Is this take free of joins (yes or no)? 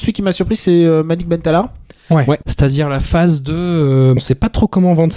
no